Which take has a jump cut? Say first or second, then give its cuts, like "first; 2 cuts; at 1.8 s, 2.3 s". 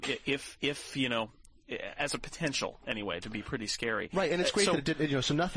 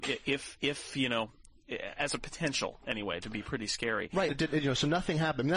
second; 1 cut; at 4.3 s